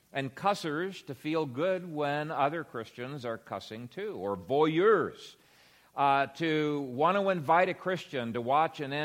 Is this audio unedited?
yes; 0 cuts

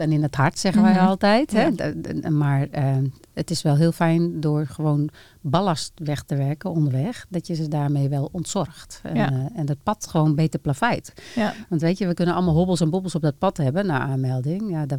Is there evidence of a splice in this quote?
no; 0 cuts

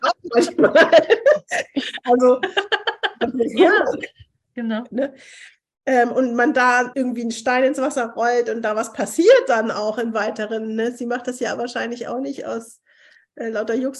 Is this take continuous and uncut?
no; 2 cuts; at 4.9 s, 6.9 s

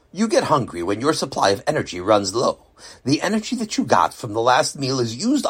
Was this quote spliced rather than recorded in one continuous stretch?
no; 0 cuts

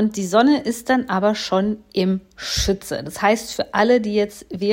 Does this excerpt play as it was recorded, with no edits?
yes; 0 cuts

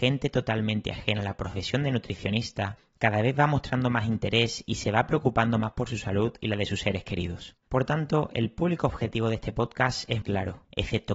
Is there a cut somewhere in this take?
yes; 2 cuts; at 7.6 s, 10.2 s

